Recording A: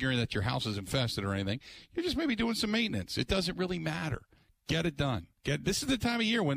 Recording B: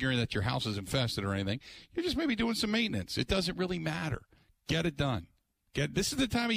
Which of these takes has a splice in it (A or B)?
A